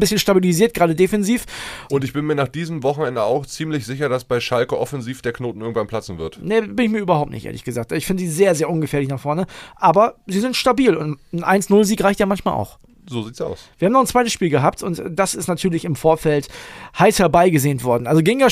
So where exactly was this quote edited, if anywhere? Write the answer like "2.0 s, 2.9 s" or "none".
1.9 s